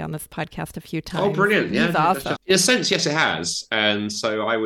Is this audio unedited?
no; 1 cut; at 2.3 s

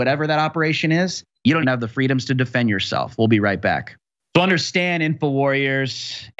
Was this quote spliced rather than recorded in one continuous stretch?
yes; 1 cut; at 1.6 s

